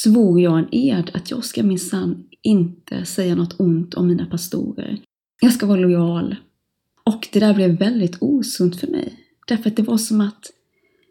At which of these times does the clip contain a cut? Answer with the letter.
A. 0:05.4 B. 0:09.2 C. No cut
A